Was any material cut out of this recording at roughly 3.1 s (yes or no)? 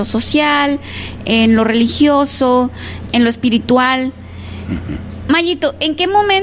yes